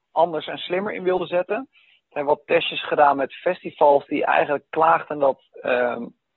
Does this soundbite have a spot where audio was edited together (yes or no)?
no